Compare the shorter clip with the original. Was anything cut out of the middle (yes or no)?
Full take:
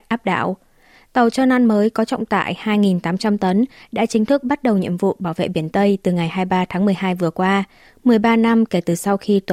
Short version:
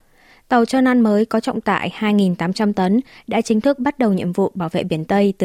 no